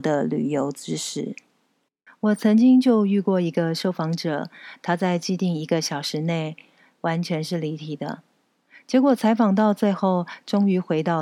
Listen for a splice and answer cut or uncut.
cut